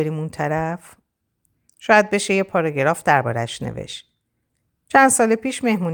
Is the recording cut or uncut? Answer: uncut